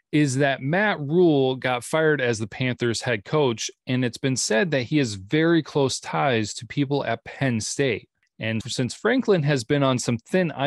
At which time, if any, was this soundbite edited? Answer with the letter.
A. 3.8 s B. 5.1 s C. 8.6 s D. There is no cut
C